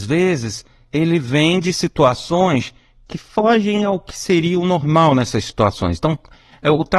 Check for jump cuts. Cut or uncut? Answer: uncut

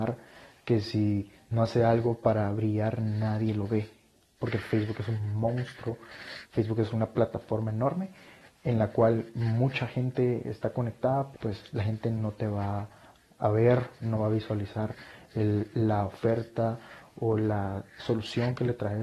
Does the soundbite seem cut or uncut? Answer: cut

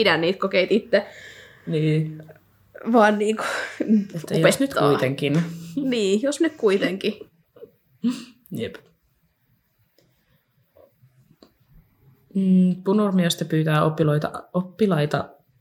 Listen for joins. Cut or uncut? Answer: uncut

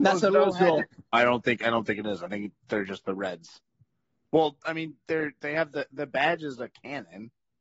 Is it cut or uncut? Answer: cut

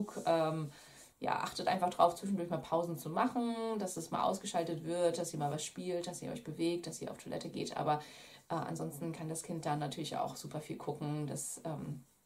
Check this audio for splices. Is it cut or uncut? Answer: uncut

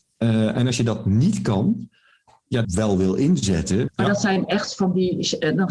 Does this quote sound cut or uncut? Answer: cut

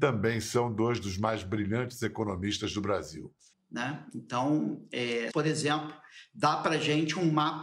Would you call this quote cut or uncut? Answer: cut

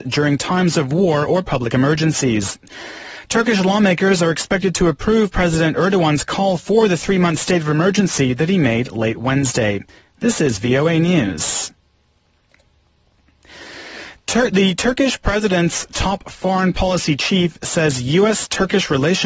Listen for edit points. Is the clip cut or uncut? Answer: uncut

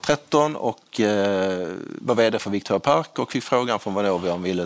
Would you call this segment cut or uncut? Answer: cut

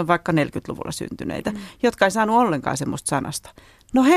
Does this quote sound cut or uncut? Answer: uncut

